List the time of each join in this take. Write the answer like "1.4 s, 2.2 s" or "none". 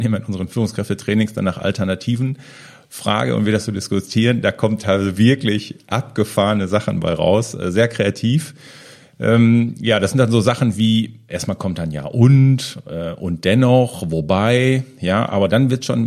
5.1 s, 11.3 s